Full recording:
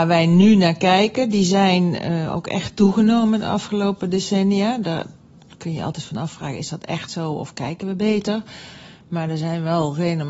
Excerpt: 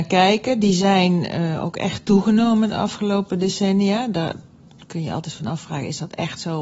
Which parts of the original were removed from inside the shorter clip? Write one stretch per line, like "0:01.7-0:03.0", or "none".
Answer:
none